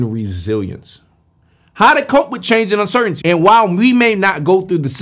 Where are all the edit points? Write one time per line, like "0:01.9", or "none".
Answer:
0:03.2